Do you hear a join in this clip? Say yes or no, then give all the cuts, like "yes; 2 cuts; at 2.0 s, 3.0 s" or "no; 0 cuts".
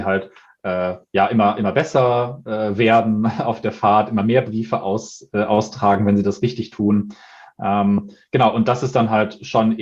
no; 0 cuts